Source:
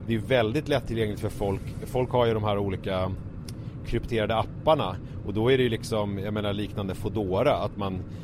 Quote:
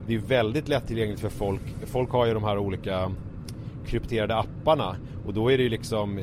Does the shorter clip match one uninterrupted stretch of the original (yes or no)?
yes